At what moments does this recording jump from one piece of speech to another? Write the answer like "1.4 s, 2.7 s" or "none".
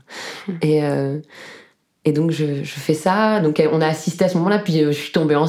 none